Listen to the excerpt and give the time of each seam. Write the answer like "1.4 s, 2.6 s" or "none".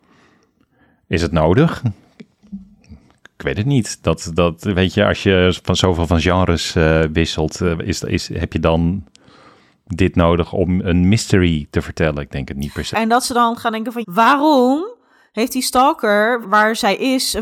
12.9 s, 14.0 s, 16.4 s